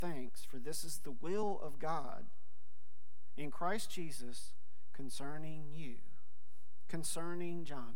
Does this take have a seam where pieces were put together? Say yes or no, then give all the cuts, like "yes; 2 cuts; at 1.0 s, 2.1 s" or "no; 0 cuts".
no; 0 cuts